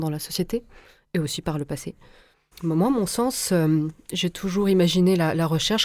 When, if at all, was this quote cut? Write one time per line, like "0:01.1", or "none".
0:02.5

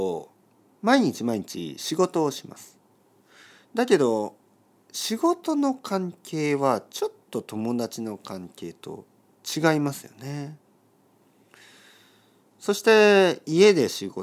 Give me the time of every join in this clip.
none

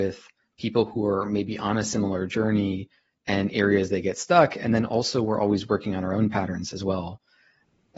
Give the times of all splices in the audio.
none

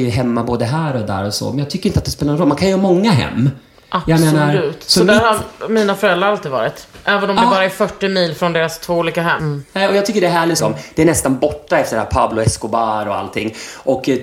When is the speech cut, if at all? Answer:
0:09.4
0:10.6

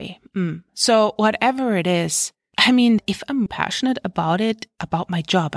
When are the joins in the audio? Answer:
0:03.5

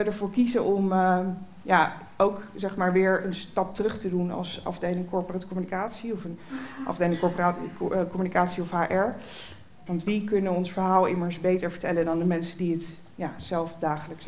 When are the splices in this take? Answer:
0:09.9

